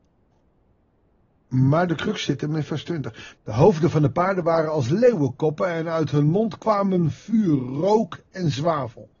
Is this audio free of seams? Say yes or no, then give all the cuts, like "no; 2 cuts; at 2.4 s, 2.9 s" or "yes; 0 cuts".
no; 1 cut; at 3.4 s